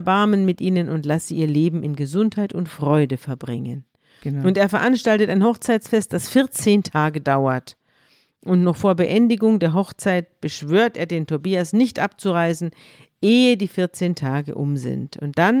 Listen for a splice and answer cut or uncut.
uncut